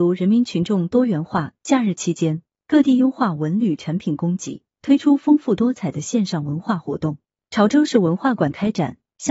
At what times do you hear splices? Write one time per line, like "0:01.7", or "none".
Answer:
0:01.5
0:07.4